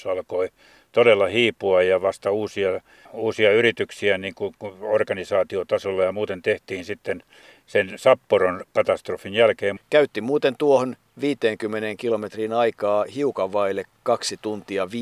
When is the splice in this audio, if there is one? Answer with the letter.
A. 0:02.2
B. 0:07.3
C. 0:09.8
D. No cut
C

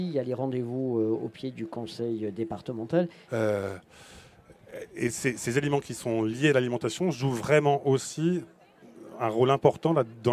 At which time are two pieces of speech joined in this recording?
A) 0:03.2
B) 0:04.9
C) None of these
A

